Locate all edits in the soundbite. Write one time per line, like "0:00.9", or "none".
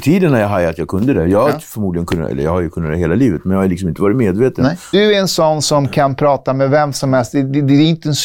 0:04.9